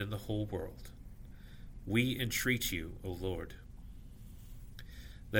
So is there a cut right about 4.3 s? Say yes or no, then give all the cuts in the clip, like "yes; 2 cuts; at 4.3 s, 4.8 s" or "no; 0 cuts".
no; 1 cut; at 1.8 s